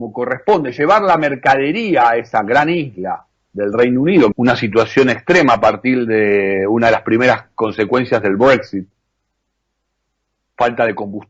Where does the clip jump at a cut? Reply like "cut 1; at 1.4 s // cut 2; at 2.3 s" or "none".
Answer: cut 1; at 4.3 s